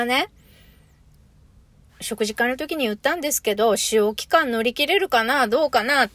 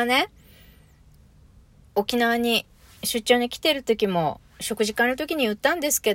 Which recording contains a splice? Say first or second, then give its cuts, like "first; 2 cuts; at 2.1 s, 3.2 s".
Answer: first; 1 cut; at 1.9 s